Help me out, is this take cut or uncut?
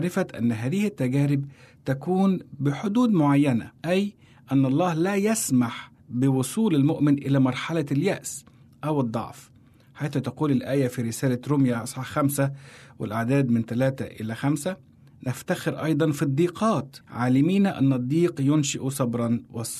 cut